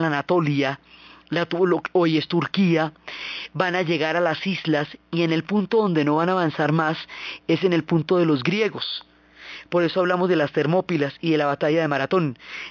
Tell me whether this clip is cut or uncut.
uncut